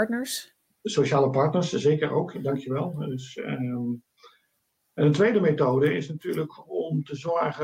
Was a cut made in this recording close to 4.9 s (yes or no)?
no